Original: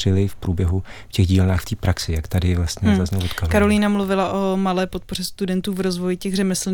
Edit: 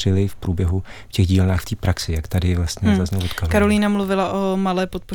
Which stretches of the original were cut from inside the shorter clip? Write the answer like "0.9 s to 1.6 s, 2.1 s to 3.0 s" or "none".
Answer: none